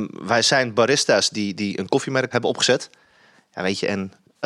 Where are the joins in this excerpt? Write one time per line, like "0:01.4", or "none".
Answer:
0:02.3